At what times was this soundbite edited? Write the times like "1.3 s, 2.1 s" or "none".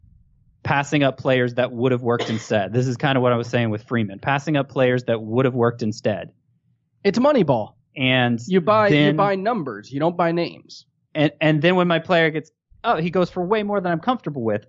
none